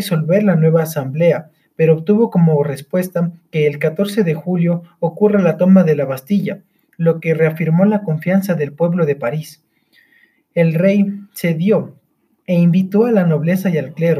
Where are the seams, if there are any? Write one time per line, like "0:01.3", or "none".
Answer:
none